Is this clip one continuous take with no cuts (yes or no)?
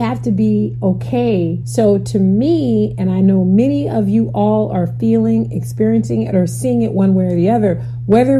no